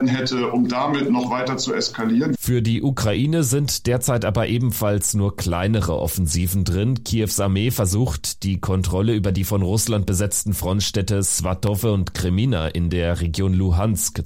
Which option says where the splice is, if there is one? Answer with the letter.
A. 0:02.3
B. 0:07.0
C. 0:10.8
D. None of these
A